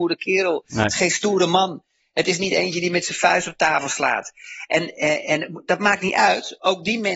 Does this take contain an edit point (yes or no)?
no